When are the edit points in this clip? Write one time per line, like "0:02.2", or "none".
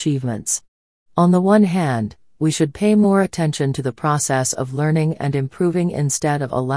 none

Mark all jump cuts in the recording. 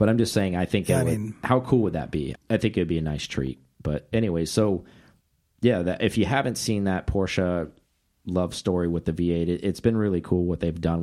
0:02.3

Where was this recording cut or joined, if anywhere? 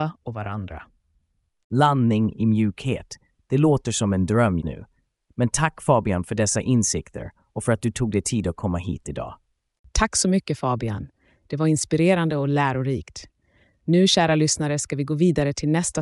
0:04.6

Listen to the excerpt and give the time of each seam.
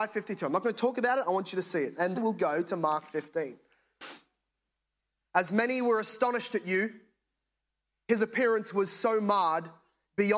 0:02.1
0:05.2

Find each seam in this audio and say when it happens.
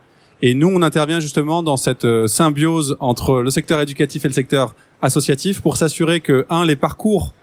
none

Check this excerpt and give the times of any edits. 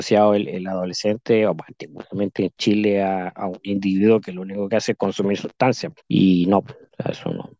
0:06.0

